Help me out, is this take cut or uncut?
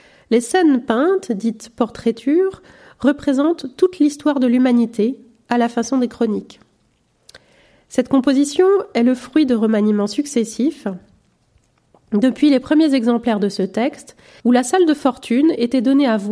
cut